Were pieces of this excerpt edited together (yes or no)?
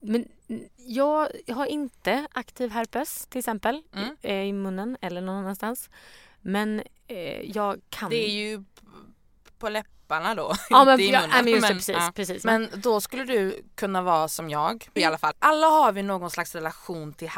yes